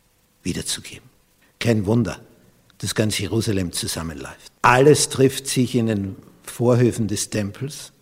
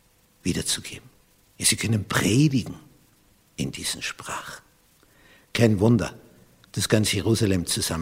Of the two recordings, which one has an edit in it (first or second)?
first